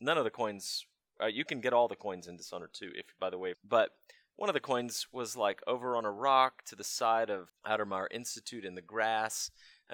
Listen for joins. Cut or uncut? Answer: cut